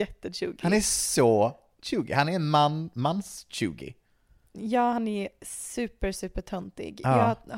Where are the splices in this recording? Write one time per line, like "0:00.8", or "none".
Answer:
none